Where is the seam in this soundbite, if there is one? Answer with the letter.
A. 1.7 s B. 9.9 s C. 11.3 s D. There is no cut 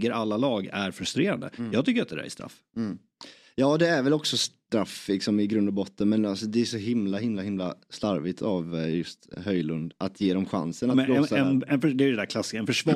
B